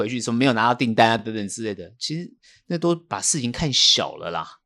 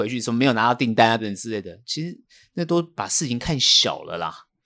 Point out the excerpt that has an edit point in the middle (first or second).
second